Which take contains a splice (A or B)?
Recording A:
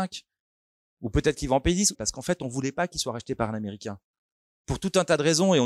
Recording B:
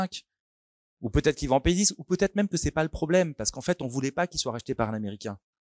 A